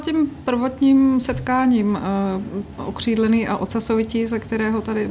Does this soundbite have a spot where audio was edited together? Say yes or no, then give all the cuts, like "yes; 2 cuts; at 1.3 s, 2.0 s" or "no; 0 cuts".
yes; 1 cut; at 2.8 s